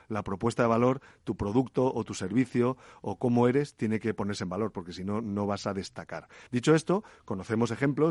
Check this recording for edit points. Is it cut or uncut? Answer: cut